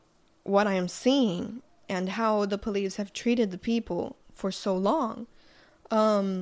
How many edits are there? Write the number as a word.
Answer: zero